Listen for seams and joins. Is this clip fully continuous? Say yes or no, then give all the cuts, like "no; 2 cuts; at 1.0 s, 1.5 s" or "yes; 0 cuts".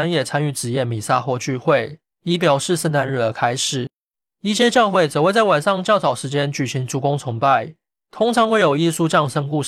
no; 1 cut; at 2.1 s